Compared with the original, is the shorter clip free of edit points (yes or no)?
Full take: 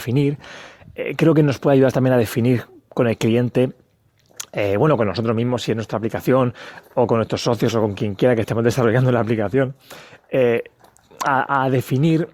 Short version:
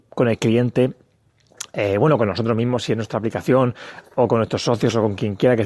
yes